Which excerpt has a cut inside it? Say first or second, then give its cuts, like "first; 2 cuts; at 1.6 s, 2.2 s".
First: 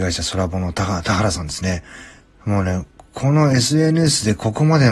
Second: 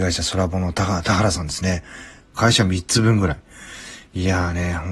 second; 1 cut; at 2.3 s